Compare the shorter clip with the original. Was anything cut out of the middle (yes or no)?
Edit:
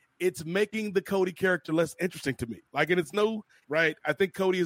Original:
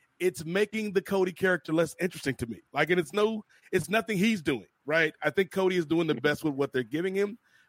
yes